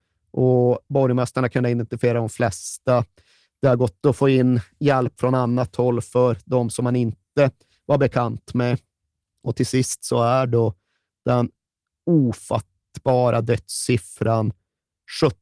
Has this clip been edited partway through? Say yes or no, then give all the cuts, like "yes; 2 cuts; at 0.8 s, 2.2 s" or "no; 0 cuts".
no; 0 cuts